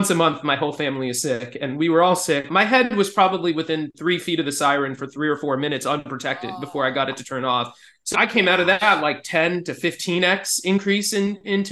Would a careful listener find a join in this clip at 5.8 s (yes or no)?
no